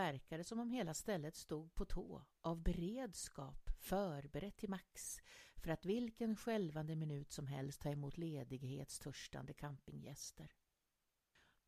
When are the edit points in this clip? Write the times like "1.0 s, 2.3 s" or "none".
none